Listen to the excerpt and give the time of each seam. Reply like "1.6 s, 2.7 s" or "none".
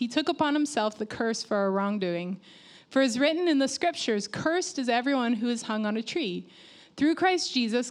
none